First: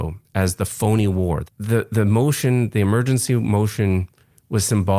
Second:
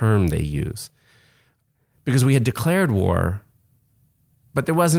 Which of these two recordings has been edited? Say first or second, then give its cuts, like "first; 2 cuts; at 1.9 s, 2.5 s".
first; 1 cut; at 1.5 s